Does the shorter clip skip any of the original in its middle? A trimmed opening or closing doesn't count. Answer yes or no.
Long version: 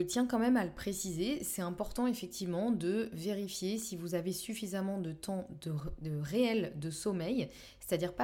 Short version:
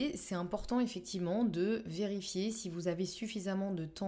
no